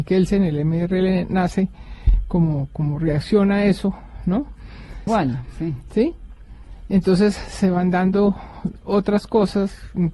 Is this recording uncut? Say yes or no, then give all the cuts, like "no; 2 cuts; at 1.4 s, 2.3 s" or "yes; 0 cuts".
no; 1 cut; at 5.1 s